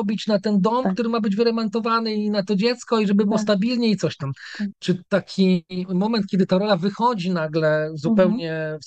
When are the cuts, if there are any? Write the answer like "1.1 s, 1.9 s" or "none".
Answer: 4.7 s

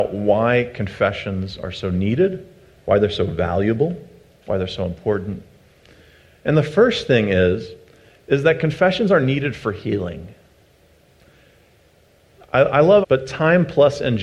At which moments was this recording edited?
13.0 s

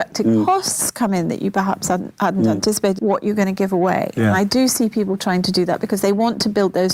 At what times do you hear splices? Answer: 3.0 s

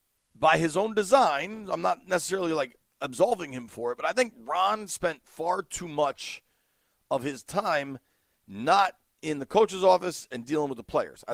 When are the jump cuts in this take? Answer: none

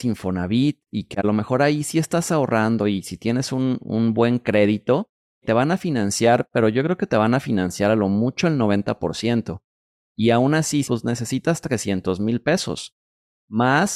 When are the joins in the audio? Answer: 5.4 s, 10.8 s

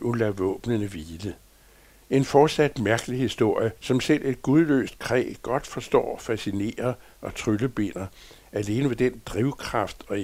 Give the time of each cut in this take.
2.0 s, 3.8 s

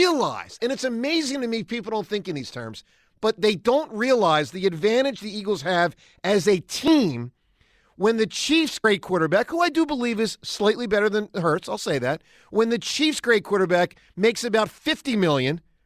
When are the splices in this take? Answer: none

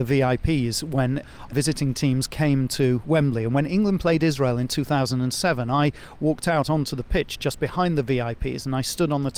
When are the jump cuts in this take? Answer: none

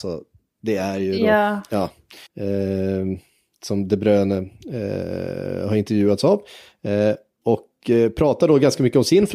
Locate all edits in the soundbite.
2.3 s

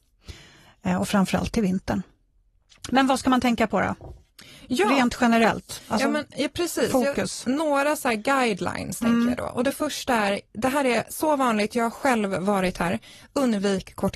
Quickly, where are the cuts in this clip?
none

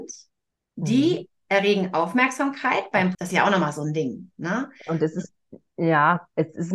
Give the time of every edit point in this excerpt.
3.1 s

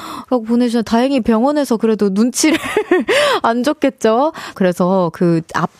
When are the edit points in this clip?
4.5 s

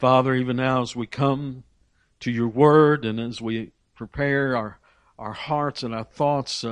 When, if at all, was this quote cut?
none

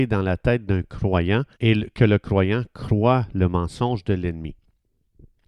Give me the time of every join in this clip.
1.5 s

